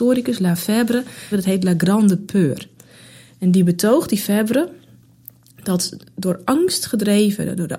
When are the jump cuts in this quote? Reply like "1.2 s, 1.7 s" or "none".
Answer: 1.3 s